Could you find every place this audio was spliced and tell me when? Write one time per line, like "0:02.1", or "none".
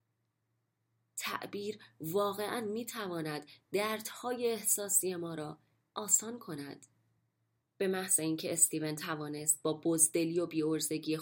0:07.6